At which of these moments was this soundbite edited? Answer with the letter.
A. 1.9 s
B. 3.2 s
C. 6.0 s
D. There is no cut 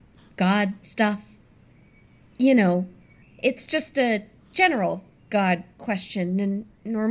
B